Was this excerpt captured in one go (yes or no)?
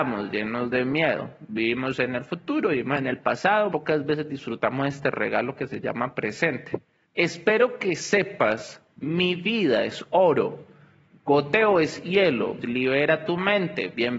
no